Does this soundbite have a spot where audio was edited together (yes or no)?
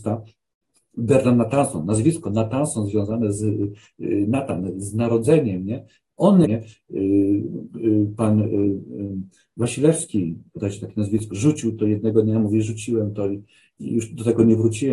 yes